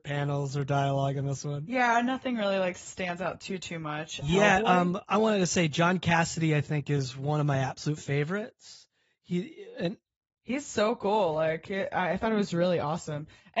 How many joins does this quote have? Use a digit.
1